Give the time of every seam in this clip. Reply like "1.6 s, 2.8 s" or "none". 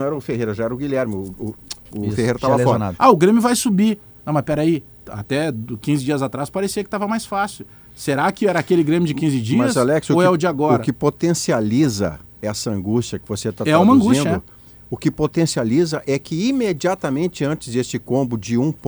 3.0 s